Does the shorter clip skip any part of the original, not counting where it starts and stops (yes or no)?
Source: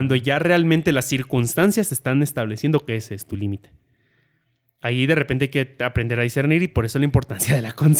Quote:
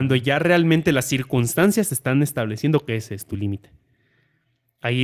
no